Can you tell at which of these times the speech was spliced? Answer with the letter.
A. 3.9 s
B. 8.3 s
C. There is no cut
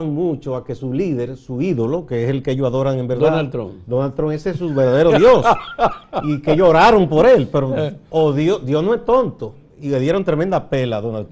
C